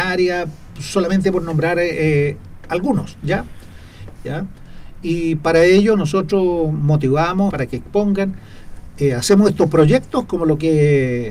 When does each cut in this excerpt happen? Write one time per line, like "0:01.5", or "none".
0:04.1
0:07.5